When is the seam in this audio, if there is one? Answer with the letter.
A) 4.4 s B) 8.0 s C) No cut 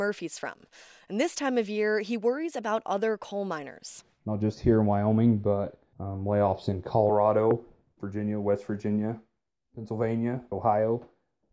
B